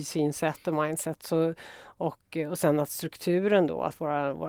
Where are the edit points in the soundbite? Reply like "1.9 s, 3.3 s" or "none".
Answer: none